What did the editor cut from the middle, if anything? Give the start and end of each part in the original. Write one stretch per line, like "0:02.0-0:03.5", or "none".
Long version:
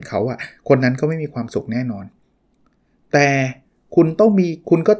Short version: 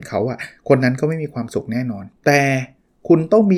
0:02.2-0:03.0